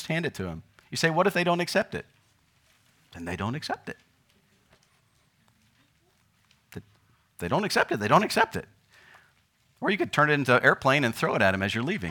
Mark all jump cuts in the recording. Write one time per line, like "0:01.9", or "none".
none